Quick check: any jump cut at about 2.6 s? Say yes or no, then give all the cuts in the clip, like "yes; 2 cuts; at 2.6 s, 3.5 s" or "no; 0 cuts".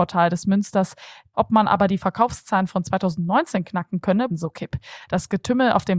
no; 2 cuts; at 1.3 s, 4.3 s